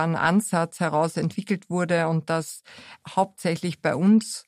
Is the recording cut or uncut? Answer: cut